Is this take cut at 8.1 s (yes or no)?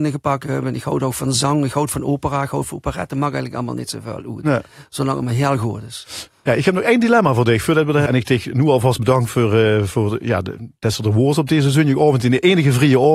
yes